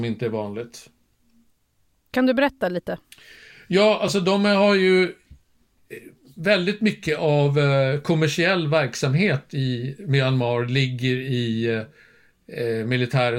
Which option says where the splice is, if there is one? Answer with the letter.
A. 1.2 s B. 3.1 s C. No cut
C